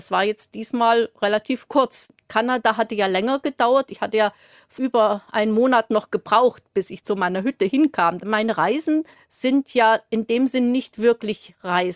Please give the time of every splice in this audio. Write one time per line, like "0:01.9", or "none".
0:08.2